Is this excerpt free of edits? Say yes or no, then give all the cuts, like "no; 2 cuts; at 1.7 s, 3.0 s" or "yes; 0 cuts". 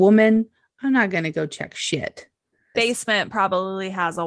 no; 1 cut; at 2.7 s